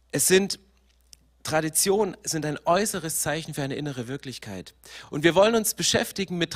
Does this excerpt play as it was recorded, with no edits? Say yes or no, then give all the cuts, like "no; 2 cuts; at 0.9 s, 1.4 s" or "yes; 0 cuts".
yes; 0 cuts